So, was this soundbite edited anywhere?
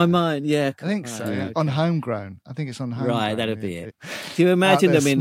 yes; 1 cut; at 3.9 s

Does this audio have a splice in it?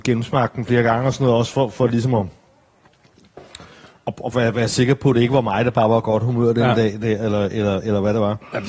no; 0 cuts

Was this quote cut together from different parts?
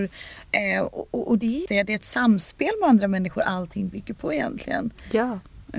yes; 1 cut; at 1.7 s

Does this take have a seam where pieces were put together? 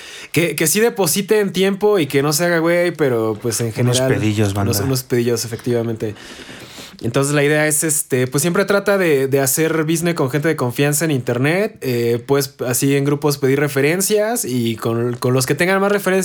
yes; 1 cut; at 2.9 s

